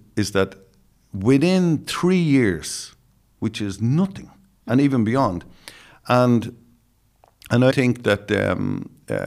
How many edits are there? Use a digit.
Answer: 2